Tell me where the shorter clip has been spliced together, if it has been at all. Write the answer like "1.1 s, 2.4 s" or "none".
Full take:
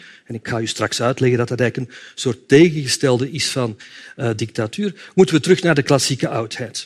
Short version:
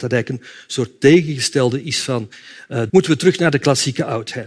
2.9 s